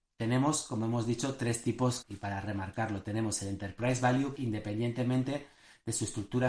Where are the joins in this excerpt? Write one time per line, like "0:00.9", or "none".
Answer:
0:02.0
0:04.3